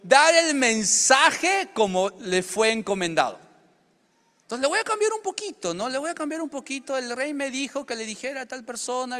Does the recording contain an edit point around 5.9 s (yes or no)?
no